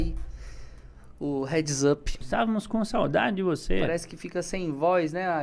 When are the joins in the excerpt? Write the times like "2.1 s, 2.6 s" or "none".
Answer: 2.2 s